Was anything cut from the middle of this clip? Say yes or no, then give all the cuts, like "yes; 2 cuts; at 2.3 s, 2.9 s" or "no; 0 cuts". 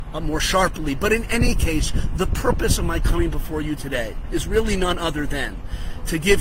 no; 0 cuts